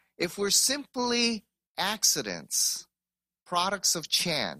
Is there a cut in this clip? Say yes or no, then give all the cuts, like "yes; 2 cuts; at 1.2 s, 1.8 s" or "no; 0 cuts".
no; 0 cuts